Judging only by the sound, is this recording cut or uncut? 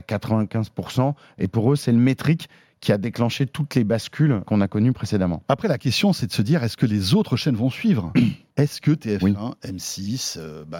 cut